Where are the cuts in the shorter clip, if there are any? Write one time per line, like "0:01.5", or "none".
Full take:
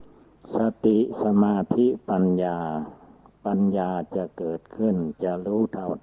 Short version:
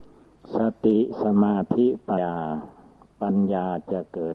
0:02.2